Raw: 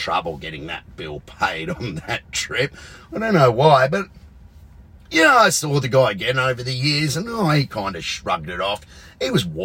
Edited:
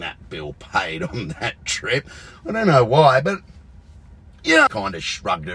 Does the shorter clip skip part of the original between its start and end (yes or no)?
yes